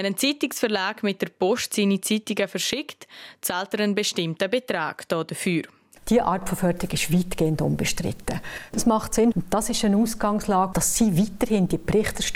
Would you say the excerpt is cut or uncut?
cut